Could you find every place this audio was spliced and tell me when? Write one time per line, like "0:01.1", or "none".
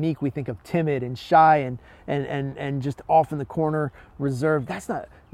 none